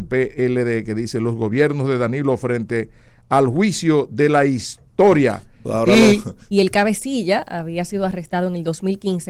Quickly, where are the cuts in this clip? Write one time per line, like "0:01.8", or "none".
0:06.5